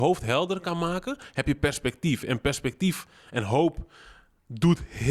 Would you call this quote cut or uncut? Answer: uncut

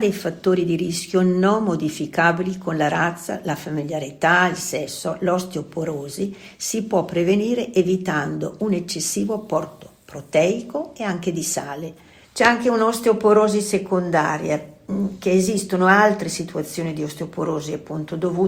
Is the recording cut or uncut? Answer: cut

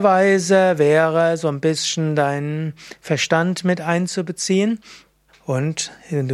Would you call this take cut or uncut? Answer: cut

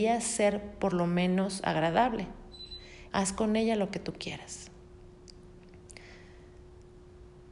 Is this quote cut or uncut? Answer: cut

